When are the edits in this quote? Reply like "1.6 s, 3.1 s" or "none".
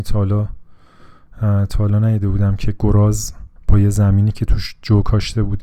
3.6 s